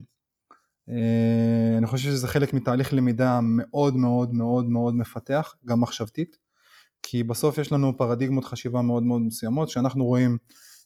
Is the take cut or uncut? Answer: uncut